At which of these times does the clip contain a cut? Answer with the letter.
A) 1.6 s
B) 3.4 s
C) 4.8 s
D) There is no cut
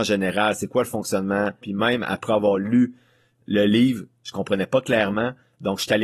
A